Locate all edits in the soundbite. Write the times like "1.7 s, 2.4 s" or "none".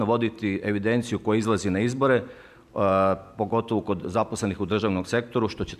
none